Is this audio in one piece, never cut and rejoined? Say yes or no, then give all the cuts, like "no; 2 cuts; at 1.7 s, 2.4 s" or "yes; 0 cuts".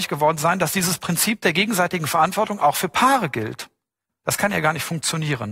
no; 1 cut; at 4.1 s